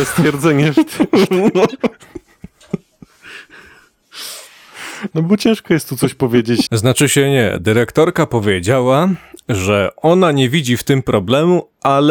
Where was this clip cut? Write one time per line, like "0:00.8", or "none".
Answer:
0:05.1
0:06.7